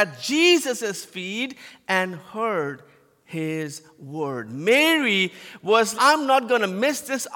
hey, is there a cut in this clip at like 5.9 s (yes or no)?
yes